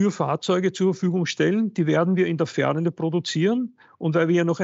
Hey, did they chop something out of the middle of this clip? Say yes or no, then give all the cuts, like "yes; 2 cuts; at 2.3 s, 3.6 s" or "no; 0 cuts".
no; 0 cuts